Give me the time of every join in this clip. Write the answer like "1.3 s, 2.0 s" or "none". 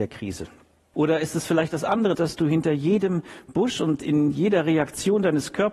0.9 s, 2.1 s